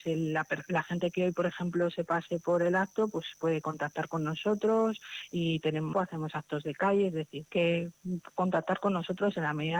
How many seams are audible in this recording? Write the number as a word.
two